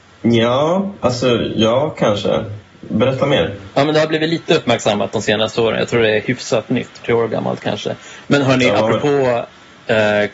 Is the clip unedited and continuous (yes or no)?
no